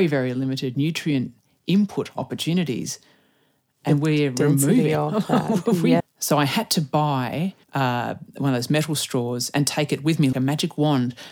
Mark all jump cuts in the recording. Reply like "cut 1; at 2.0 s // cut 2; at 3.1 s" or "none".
cut 1; at 6.0 s // cut 2; at 7.6 s // cut 3; at 10.3 s